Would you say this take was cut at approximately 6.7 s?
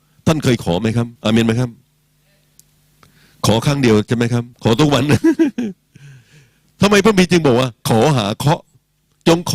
no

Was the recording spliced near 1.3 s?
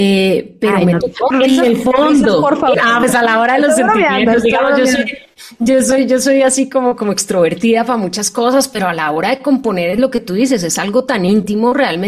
yes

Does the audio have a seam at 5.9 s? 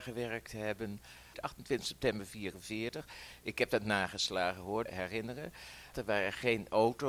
yes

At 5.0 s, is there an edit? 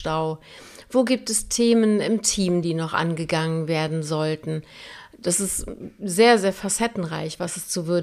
no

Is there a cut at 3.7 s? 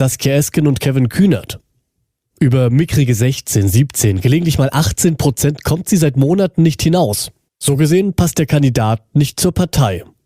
no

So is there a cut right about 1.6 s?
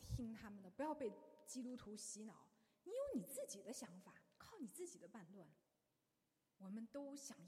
no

